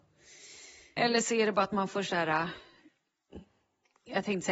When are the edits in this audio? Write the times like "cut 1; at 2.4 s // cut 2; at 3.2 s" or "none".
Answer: cut 1; at 1.0 s